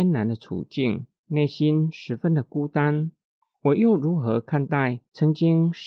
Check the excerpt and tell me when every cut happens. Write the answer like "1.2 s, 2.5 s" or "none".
3.5 s